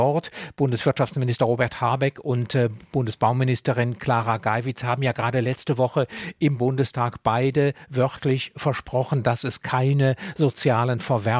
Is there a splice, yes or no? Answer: no